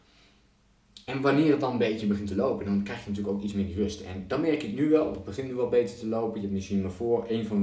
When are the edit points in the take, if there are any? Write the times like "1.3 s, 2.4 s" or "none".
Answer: none

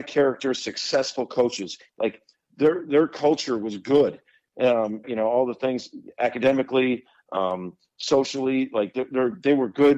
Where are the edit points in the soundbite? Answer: 1.9 s, 5.0 s

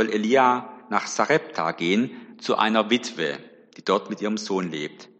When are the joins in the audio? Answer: none

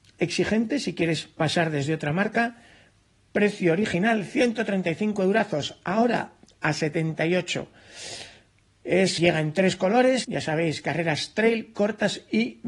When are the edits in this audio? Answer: 9.2 s, 10.2 s

